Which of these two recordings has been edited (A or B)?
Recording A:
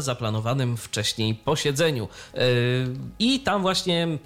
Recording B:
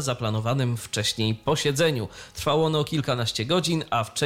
A